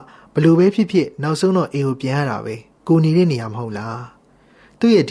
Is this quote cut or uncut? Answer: cut